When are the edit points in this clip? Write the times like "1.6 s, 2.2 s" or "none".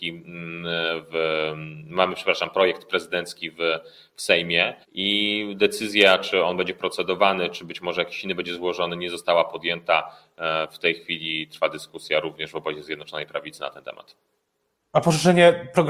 4.8 s